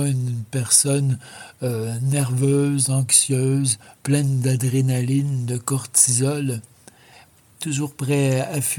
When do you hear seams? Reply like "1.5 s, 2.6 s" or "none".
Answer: none